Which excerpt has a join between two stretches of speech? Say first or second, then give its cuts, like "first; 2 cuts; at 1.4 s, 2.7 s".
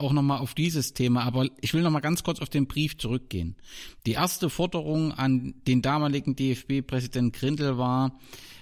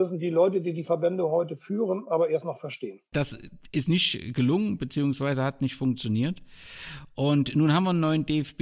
second; 1 cut; at 3.1 s